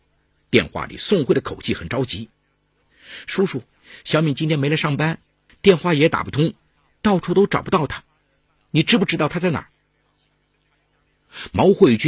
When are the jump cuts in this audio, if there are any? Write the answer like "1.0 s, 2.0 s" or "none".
none